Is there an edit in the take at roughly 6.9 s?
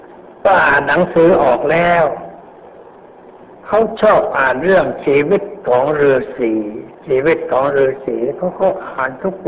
yes; 1 cut; at 6.9 s

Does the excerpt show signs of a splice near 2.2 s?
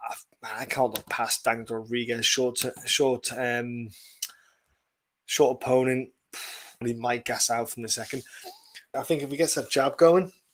no; 2 cuts; at 6.8 s, 8.9 s

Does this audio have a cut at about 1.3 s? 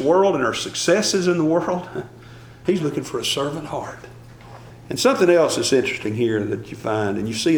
no; 2 cuts; at 2.7 s, 4.7 s

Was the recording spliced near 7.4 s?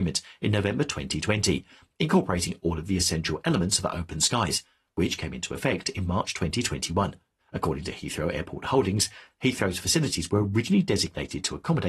yes; 1 cut; at 7.4 s

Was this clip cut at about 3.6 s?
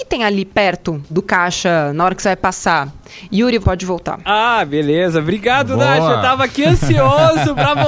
yes; 2 cuts; at 1.1 s, 3.6 s

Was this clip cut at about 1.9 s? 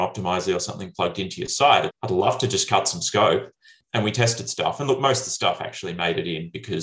yes; 1 cut; at 1.9 s

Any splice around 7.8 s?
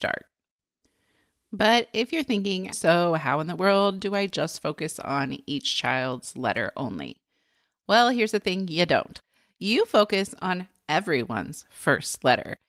no; 1 cut; at 2.7 s

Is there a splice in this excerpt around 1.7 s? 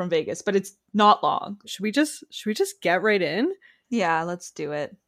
yes; 1 cut; at 1.7 s

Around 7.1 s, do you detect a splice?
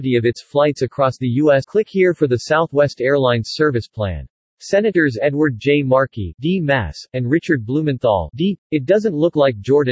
no; 2 cuts; at 1.6 s, 8.6 s

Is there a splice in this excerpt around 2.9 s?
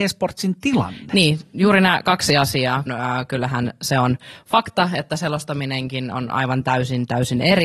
yes; 1 cut; at 2.9 s

